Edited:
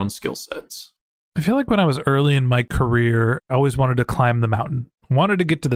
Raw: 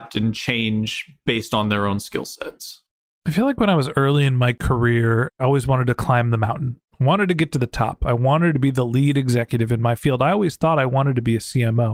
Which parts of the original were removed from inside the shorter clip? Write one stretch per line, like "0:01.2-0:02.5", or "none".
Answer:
none